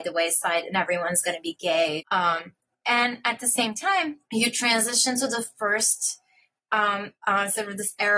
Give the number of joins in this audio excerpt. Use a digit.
3